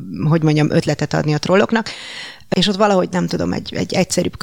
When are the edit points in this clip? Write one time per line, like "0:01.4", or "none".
none